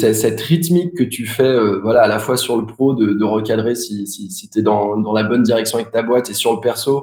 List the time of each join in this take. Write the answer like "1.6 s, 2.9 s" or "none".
none